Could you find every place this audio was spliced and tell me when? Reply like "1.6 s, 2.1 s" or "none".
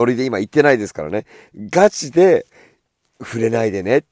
none